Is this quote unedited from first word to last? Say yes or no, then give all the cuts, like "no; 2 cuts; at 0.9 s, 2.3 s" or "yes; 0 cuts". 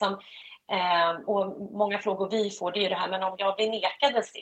no; 1 cut; at 1.3 s